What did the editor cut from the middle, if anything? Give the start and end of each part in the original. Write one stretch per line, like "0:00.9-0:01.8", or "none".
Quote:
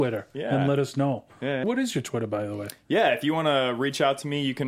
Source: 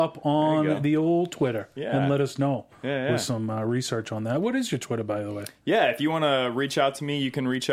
0:03.1-0:04.4